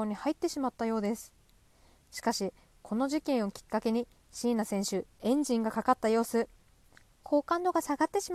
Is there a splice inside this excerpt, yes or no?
yes